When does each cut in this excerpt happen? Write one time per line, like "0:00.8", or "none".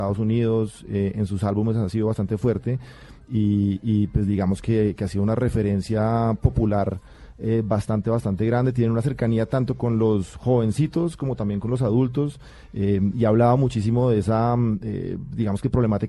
none